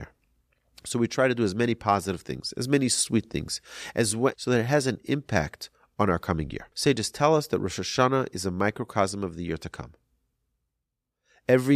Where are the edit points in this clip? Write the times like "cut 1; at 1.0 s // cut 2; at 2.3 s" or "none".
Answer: cut 1; at 4.3 s // cut 2; at 6.7 s